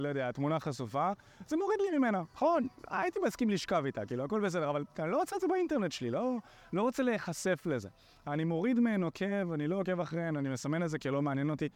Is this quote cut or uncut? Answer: uncut